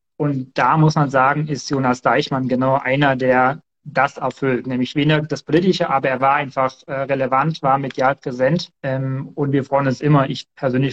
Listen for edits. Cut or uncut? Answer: cut